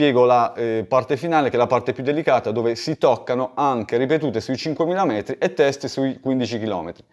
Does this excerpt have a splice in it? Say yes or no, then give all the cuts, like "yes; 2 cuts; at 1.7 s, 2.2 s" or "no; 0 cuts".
no; 0 cuts